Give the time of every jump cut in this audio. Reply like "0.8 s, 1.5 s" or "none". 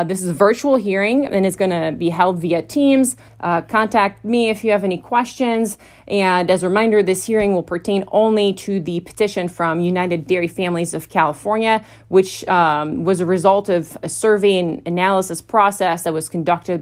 3.3 s